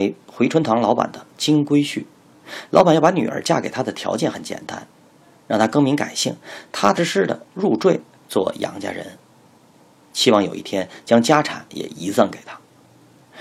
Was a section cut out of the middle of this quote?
yes; 1 cut; at 7.0 s

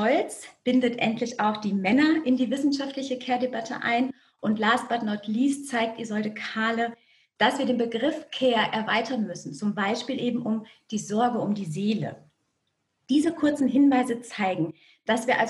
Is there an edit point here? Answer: no; 0 cuts

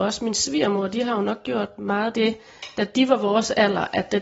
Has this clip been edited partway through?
no; 0 cuts

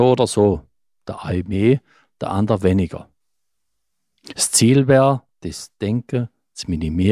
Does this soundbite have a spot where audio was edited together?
no; 0 cuts

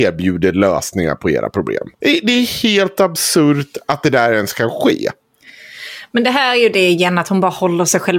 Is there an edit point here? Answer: yes; 1 cut; at 1.9 s

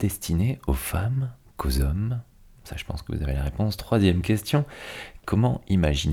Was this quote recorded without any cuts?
no; 1 cut; at 5.2 s

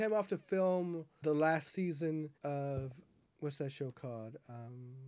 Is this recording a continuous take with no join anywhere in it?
no; 2 cuts; at 1.2 s, 2.4 s

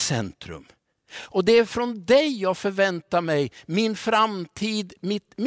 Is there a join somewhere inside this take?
no; 0 cuts

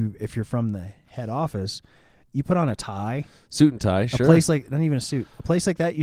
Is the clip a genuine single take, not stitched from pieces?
yes; 0 cuts

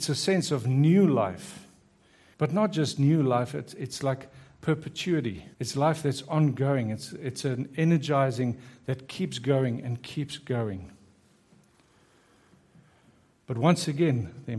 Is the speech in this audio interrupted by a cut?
yes; 2 cuts; at 2.3 s, 5.5 s

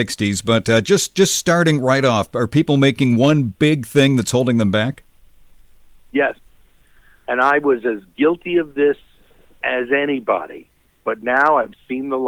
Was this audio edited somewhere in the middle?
no; 0 cuts

